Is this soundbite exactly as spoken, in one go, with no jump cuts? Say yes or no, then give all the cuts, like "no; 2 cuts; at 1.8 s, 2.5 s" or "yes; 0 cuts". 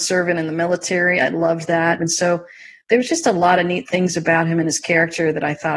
no; 1 cut; at 2.0 s